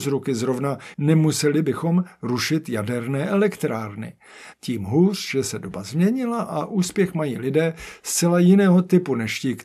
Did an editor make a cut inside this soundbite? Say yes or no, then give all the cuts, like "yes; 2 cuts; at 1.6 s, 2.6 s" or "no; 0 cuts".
yes; 2 cuts; at 0.9 s, 4.5 s